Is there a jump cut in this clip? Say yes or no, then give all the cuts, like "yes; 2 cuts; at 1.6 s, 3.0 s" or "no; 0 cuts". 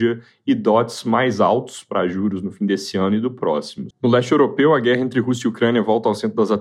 yes; 1 cut; at 3.9 s